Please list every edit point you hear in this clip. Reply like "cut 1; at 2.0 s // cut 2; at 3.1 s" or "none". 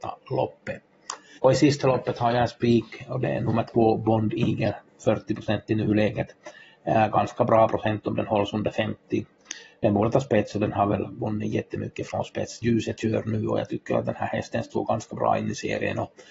cut 1; at 1.4 s // cut 2; at 12.6 s